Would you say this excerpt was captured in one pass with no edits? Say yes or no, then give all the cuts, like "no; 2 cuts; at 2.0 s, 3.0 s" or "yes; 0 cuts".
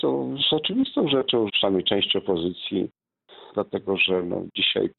no; 2 cuts; at 1.5 s, 3.5 s